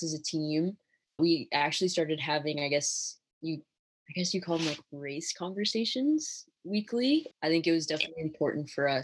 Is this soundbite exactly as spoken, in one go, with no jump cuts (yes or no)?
no